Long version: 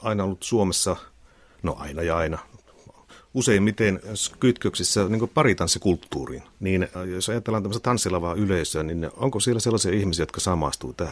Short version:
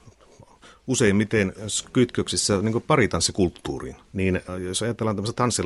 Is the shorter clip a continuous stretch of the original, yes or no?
yes